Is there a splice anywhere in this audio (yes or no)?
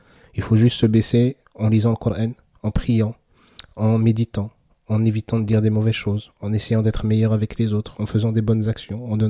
no